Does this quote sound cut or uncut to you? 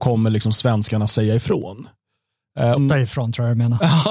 cut